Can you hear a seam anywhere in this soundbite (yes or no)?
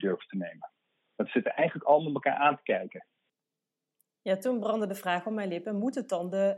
no